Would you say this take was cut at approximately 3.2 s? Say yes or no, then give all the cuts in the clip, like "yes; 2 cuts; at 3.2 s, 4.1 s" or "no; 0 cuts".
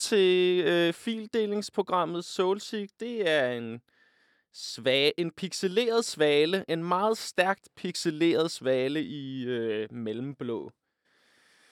no; 0 cuts